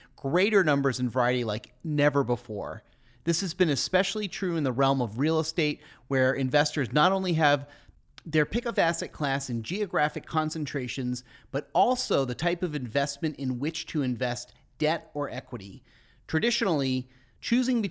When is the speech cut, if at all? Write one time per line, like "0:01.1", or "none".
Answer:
none